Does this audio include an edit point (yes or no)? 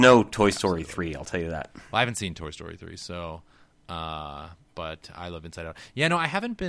no